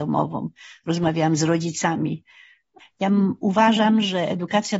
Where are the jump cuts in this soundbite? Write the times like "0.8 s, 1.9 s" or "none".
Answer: 2.8 s